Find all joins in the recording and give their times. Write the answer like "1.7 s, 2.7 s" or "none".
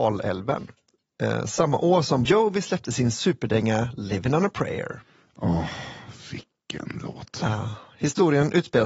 2.3 s